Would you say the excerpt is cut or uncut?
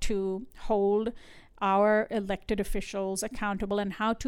uncut